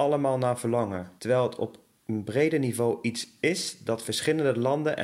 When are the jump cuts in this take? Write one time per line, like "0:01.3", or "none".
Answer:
0:01.2